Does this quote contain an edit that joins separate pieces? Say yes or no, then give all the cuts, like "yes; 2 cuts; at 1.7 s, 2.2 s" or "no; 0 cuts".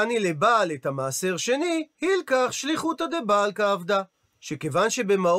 no; 0 cuts